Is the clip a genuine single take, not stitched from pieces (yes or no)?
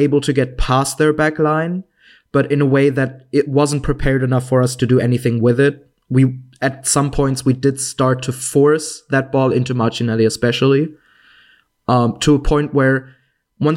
yes